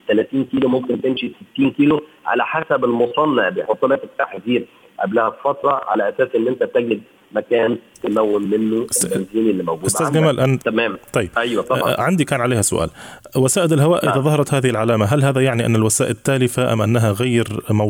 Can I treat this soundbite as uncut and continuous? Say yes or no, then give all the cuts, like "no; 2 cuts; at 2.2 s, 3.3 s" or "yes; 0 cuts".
no; 1 cut; at 10.6 s